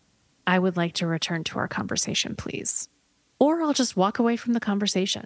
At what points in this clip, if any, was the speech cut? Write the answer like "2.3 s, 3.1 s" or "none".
none